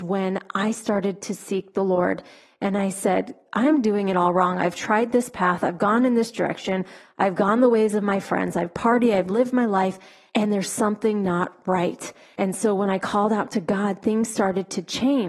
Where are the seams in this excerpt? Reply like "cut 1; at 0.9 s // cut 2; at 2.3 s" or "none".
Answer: none